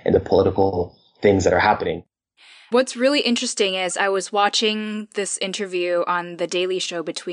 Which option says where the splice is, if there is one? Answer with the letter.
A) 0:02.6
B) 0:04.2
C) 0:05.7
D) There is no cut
D